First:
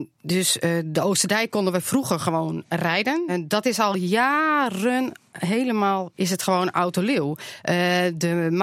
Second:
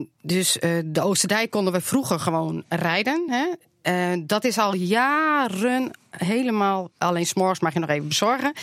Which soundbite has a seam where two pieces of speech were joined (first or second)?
first